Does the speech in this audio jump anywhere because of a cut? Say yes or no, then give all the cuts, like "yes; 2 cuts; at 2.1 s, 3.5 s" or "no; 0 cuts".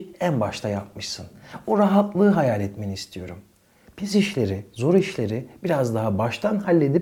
no; 0 cuts